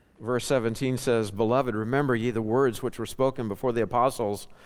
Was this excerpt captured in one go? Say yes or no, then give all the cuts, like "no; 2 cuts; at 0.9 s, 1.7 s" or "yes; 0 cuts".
yes; 0 cuts